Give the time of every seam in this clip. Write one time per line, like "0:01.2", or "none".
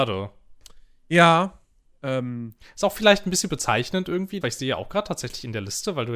0:02.0
0:04.4